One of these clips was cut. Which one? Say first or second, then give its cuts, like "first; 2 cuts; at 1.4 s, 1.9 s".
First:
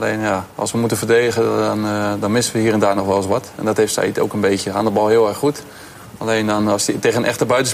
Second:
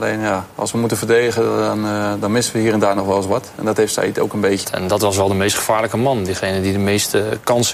second; 1 cut; at 4.6 s